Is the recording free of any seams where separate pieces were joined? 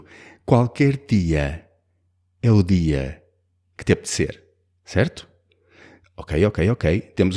yes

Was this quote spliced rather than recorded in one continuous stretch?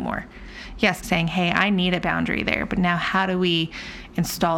yes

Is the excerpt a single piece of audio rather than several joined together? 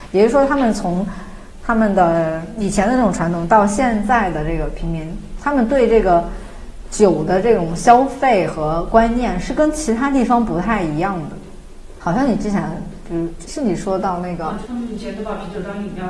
no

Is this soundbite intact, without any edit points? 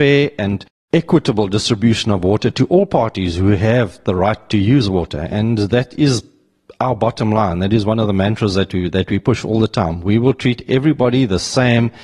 yes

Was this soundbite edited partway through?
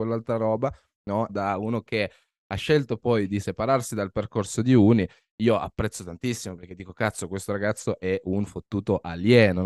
yes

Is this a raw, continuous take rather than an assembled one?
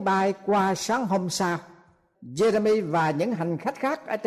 no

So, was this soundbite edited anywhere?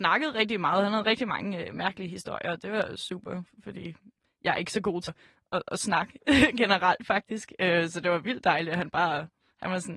yes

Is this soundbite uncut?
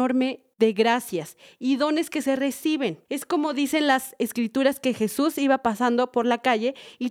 no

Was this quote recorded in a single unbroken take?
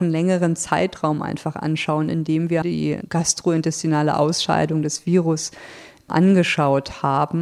no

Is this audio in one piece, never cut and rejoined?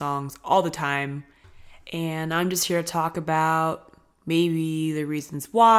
yes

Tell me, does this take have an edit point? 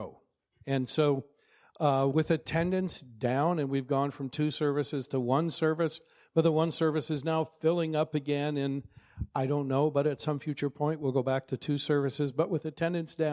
no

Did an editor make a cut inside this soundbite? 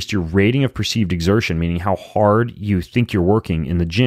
no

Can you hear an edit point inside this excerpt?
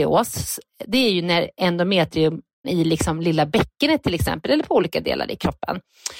yes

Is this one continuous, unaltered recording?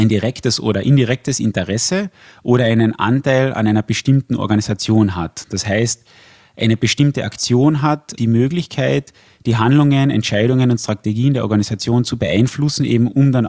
yes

